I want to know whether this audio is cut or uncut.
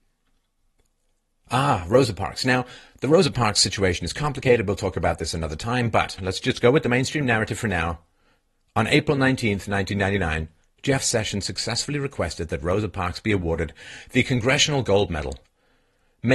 uncut